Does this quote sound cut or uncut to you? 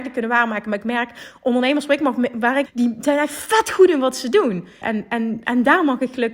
cut